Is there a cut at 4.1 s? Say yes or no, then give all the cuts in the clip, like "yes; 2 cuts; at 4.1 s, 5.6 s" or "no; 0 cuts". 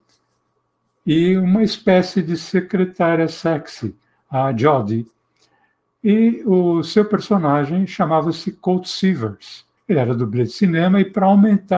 no; 1 cut; at 9.8 s